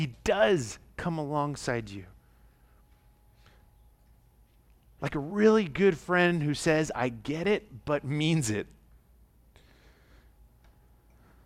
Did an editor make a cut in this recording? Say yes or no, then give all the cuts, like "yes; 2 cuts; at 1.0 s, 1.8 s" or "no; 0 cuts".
no; 0 cuts